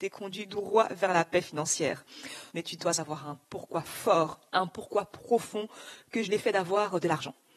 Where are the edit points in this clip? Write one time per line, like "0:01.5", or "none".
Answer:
0:02.5
0:04.5
0:06.2